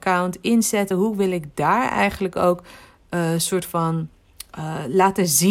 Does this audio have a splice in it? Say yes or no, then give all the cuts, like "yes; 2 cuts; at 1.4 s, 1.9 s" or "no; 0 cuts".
no; 0 cuts